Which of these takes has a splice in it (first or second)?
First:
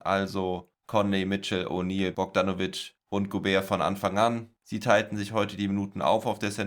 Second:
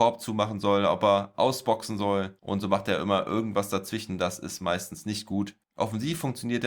first